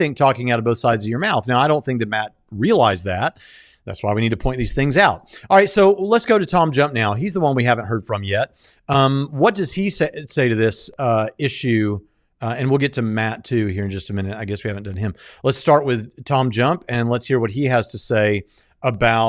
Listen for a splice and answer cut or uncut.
uncut